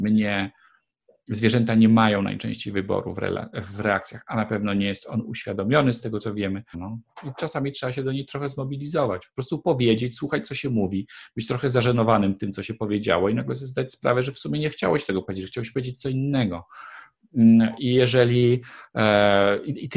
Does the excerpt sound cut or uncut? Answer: cut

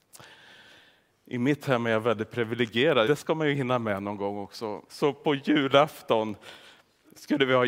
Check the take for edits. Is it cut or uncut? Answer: cut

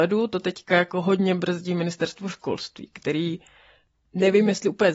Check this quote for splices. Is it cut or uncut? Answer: uncut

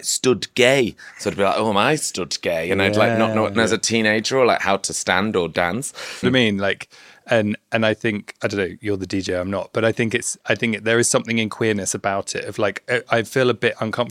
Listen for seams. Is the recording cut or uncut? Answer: cut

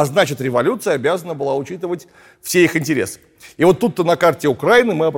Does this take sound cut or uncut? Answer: uncut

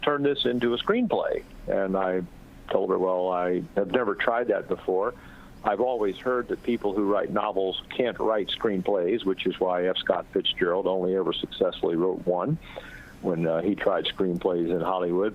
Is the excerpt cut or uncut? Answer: uncut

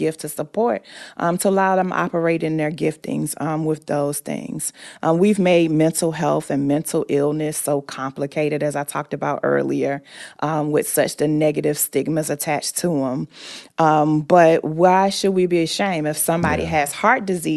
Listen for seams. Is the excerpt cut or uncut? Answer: uncut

